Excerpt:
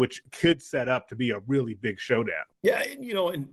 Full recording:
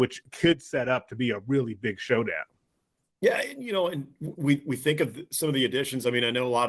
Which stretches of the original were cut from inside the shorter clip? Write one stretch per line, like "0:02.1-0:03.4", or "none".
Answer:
0:02.5-0:03.1